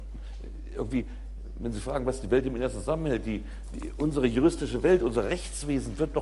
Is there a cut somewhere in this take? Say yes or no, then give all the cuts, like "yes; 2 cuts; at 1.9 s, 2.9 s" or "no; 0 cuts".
no; 0 cuts